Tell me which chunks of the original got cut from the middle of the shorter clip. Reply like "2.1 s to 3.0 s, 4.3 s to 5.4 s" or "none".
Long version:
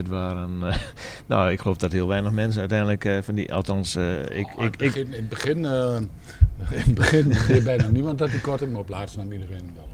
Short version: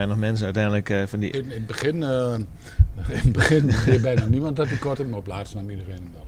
3.5 s to 4.9 s